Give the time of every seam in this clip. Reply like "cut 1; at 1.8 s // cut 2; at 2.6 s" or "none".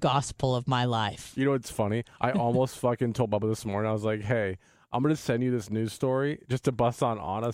none